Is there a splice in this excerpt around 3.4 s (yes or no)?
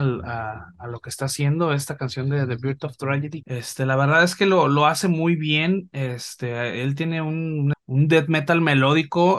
yes